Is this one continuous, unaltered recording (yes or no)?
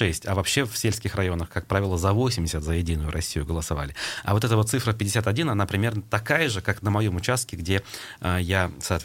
yes